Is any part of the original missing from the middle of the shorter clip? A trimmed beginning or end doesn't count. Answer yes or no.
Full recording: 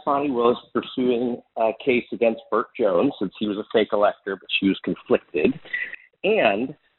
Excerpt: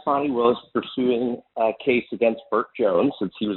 no